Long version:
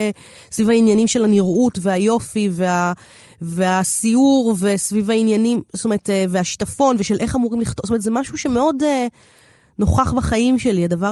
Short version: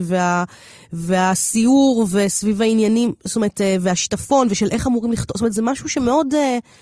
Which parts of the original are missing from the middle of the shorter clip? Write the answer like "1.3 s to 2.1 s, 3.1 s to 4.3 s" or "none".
none

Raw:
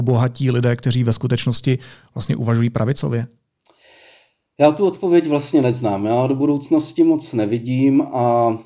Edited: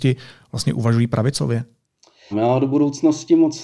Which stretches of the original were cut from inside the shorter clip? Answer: 3.9 s to 6.0 s

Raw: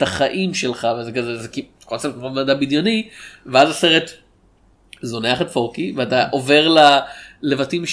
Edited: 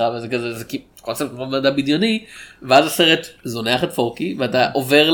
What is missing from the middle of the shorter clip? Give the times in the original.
4.2 s to 4.9 s

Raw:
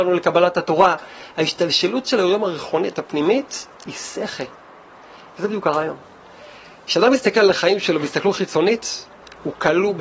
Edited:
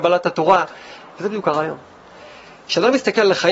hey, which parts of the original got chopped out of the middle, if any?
1.3 s to 5.2 s

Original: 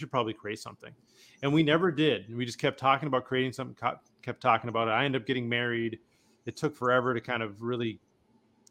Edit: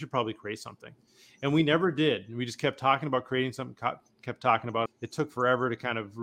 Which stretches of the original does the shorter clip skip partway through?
4.9 s to 6.3 s

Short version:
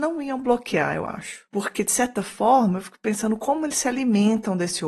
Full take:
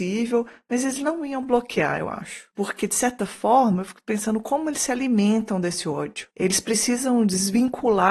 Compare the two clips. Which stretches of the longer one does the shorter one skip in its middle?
none

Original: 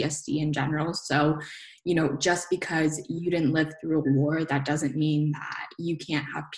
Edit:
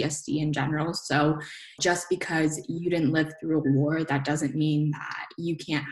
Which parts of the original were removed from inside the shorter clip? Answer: 1.8 s to 2.2 s

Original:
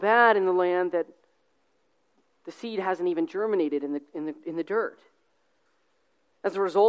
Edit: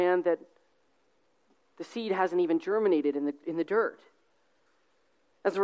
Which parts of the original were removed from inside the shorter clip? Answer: 4.1 s to 4.4 s

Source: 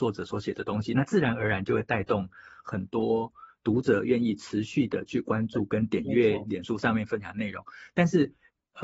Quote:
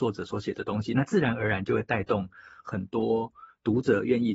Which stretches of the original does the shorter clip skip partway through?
none

